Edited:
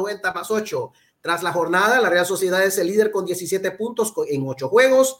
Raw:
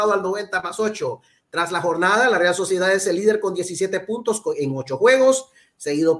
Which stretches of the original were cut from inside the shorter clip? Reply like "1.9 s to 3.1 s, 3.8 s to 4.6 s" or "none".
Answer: none

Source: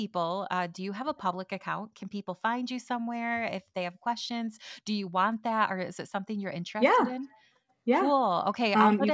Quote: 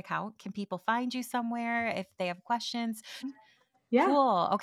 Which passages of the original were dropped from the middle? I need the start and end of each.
4.8 s to 7.2 s

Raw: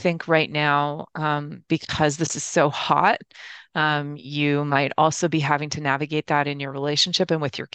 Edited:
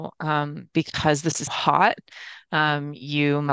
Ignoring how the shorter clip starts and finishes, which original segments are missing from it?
2.4 s to 2.7 s

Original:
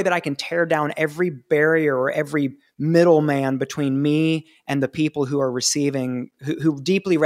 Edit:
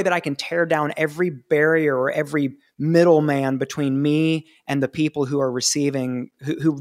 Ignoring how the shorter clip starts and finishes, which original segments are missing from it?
none

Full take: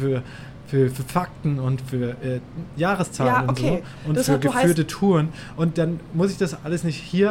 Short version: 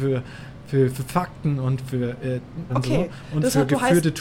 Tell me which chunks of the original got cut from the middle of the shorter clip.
2.7 s to 3.4 s

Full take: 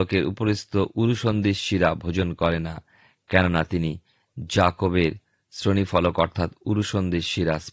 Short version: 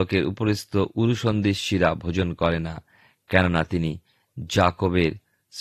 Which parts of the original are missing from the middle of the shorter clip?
none

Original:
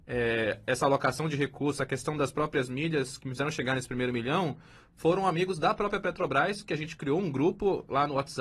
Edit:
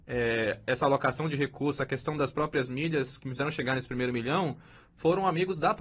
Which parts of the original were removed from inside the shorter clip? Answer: none

